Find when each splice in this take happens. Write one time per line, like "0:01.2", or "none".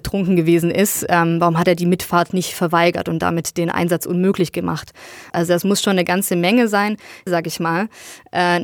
0:05.3
0:07.3